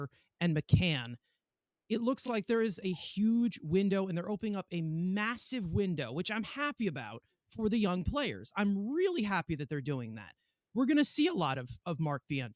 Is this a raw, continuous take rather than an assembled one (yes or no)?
yes